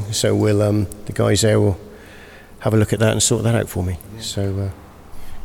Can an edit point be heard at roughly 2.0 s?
no; 0 cuts

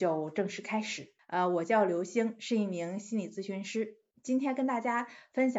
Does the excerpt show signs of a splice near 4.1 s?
no; 1 cut; at 1.2 s

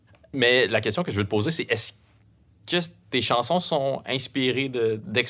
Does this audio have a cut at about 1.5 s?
no; 0 cuts

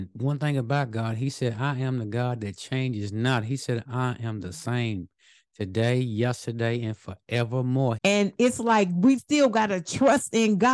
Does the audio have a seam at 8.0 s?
yes; 2 cuts; at 8.0 s, 9.2 s

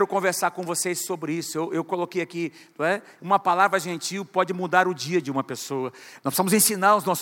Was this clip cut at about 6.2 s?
yes; 2 cuts; at 3.2 s, 6.2 s

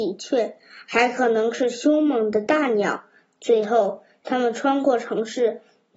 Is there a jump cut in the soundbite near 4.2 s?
no; 0 cuts

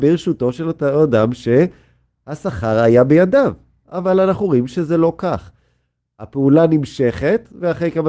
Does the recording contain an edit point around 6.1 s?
no; 0 cuts

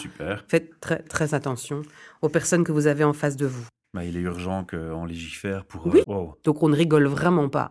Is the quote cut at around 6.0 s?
yes; 2 cuts; at 1.0 s, 6.0 s

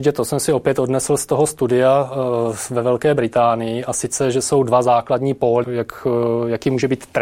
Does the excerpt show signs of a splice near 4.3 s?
no; 1 cut; at 5.6 s

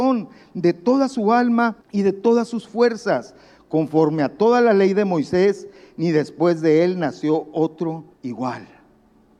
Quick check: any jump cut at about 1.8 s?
yes; 2 cuts; at 1.8 s, 8.1 s

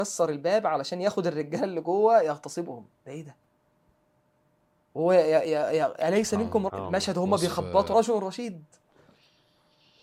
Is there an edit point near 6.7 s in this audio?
yes; 2 cuts; at 6.7 s, 7.9 s

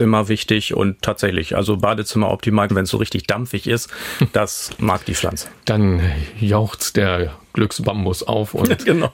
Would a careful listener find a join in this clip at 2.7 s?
yes; 1 cut; at 2.7 s

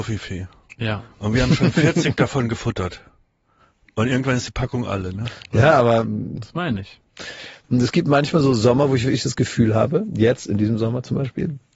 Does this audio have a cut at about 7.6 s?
yes; 1 cut; at 7.6 s

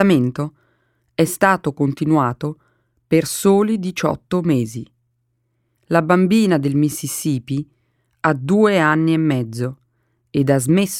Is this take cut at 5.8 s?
yes; 1 cut; at 5.8 s

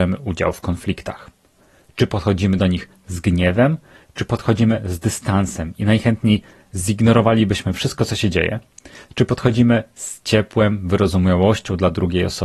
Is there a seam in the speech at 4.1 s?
no; 0 cuts

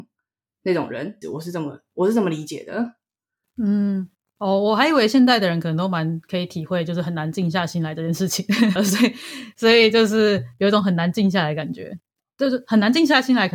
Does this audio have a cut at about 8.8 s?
yes; 2 cuts; at 1.2 s, 8.8 s

